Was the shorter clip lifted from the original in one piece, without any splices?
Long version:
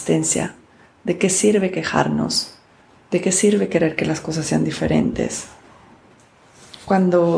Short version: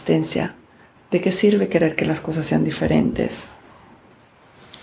no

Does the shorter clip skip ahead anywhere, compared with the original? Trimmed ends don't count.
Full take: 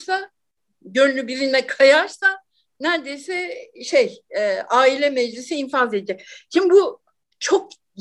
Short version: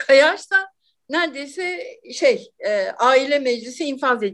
no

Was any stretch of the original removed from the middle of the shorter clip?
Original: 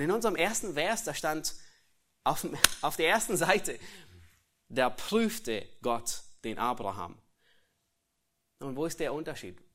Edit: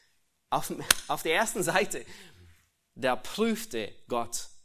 no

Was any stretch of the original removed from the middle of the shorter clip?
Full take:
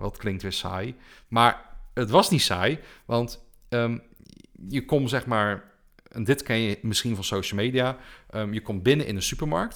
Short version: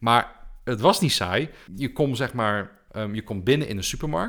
yes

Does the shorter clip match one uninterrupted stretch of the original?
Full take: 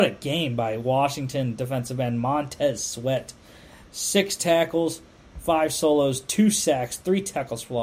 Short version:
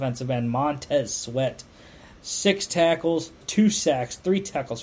no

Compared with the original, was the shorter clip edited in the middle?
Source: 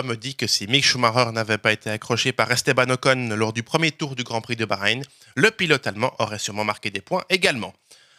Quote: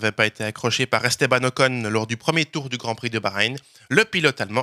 no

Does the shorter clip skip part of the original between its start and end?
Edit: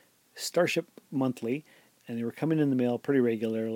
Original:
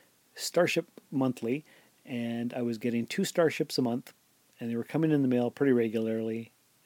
yes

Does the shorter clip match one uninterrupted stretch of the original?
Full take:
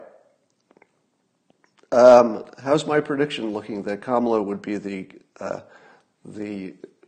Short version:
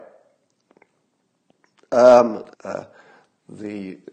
no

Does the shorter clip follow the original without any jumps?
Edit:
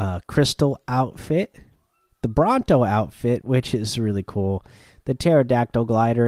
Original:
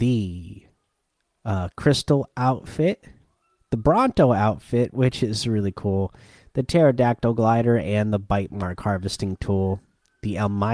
yes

